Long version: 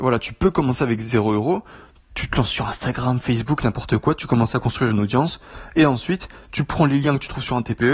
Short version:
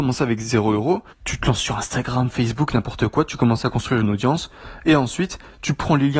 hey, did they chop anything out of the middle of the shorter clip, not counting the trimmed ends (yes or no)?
yes